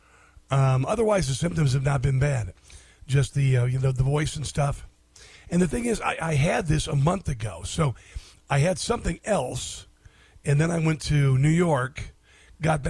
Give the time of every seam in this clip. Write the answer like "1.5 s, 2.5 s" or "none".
none